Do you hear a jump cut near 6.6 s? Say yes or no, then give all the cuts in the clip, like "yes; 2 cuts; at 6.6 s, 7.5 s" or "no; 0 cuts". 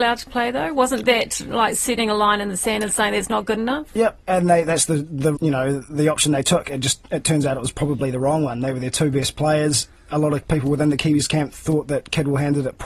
no; 1 cut; at 5.3 s